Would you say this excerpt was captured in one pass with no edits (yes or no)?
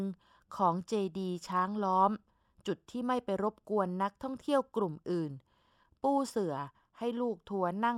yes